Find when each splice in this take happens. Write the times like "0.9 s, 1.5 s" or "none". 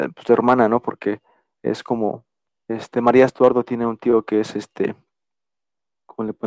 2.5 s

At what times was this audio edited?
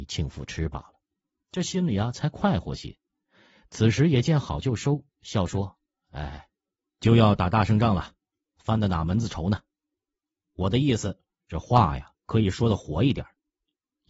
none

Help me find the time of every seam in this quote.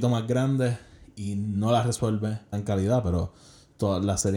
2.5 s

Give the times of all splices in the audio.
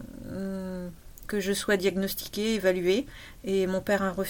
1.2 s

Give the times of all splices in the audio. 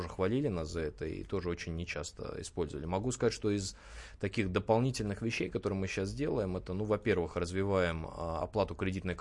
none

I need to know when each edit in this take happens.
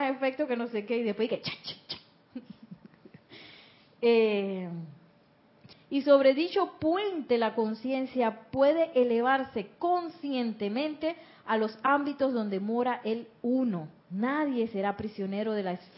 5.7 s, 14.0 s

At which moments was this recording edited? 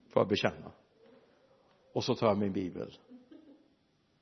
none

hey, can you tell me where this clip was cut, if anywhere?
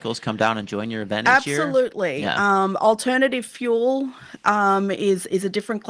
none

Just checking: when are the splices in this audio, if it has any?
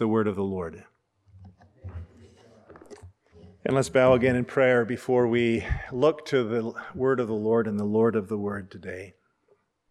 none

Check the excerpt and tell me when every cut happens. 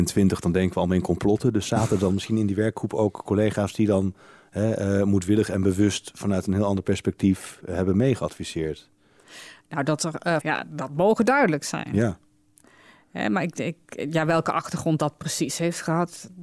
10.4 s

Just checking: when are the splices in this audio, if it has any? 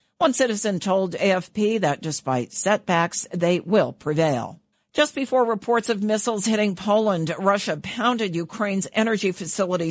4.7 s

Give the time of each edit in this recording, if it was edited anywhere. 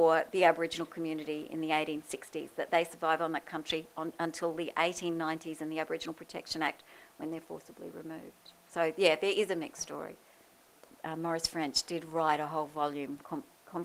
none

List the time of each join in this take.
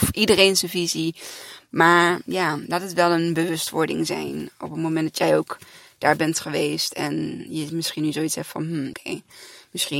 8.9 s

